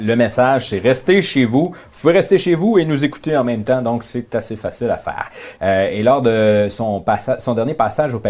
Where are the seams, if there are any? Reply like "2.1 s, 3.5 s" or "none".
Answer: 5.6 s